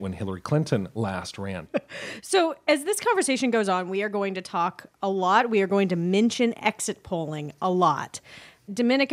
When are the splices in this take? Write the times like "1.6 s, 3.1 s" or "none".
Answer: 1.7 s